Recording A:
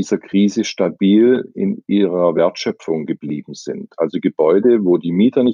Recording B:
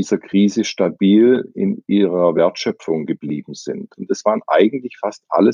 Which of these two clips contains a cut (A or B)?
B